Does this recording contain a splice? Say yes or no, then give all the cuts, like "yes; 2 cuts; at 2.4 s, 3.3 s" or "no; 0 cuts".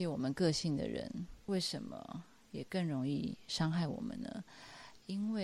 no; 0 cuts